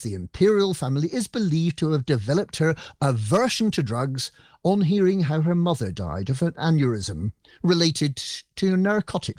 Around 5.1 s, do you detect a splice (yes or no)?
no